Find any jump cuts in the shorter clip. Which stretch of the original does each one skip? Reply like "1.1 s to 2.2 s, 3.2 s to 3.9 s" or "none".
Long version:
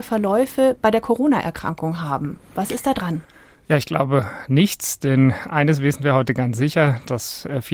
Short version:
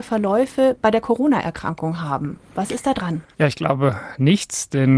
3.3 s to 3.6 s